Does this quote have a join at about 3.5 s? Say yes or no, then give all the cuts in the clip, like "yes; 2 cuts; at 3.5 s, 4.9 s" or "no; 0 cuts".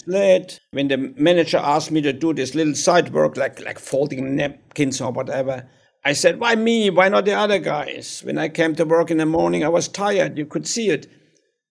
no; 0 cuts